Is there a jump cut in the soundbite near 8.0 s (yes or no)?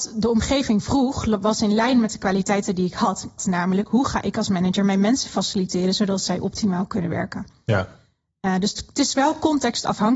no